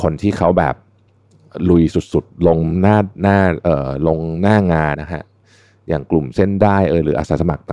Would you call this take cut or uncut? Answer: cut